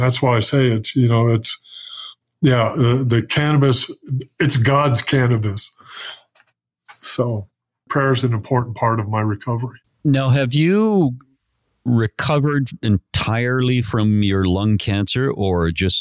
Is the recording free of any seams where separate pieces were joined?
yes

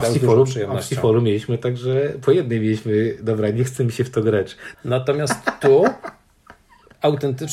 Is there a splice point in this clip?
yes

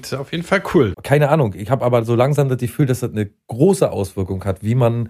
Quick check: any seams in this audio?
yes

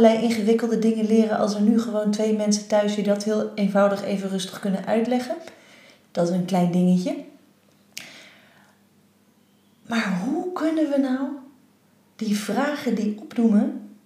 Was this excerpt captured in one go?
yes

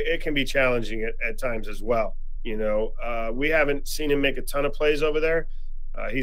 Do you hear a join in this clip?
yes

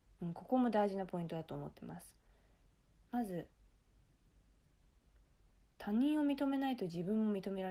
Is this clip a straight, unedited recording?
no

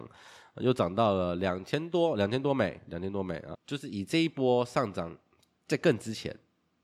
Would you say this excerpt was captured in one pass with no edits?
no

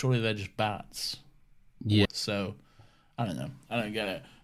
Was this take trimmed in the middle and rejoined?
yes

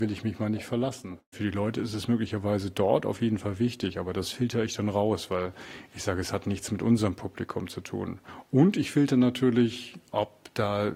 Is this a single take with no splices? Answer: no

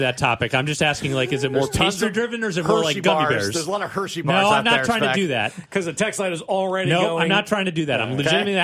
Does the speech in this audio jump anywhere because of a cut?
no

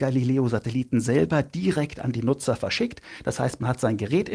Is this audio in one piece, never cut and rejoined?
yes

